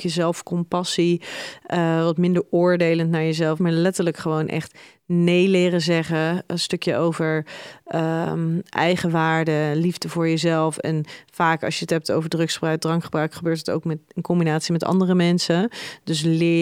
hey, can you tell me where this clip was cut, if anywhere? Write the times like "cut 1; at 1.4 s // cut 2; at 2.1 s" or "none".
cut 1; at 3.6 s